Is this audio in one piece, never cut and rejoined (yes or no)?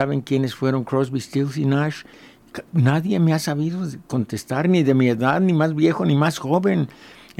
yes